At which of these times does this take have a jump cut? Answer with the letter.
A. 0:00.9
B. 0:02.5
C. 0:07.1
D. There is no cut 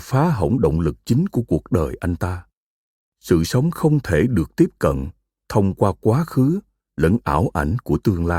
D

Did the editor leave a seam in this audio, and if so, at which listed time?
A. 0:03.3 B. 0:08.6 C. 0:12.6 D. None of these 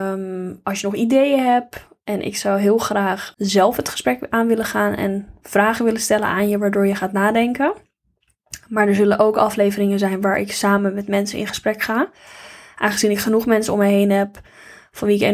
A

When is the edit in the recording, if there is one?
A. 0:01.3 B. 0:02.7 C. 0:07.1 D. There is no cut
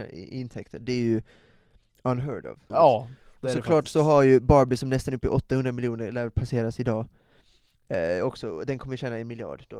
B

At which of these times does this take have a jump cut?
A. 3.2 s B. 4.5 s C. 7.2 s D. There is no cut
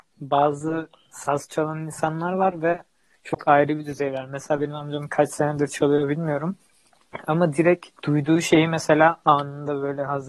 D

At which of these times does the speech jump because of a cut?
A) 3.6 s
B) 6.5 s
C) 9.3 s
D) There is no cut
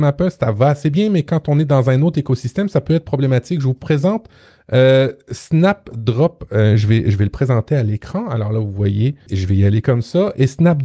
C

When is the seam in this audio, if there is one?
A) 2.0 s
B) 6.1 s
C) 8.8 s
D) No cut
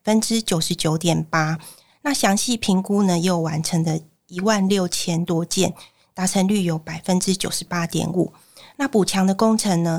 D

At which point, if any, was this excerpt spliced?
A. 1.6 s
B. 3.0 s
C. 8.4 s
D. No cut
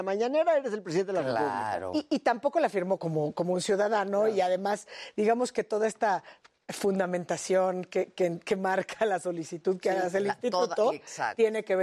B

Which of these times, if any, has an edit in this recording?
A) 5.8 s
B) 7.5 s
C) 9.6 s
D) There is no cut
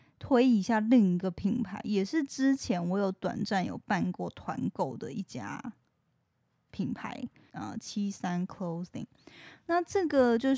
B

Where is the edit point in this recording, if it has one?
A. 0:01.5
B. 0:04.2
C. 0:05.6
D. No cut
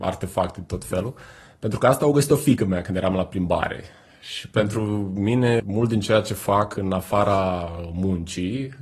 C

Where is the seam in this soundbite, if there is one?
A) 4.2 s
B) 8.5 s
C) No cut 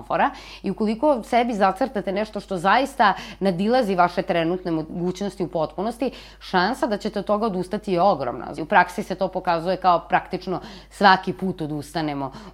B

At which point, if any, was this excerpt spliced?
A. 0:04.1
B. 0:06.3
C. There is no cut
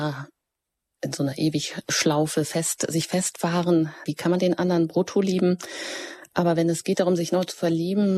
A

